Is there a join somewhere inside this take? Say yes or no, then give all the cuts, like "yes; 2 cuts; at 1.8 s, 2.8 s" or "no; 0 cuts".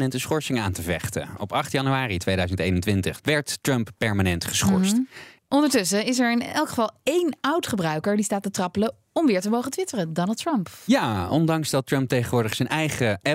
yes; 2 cuts; at 3.2 s, 5.4 s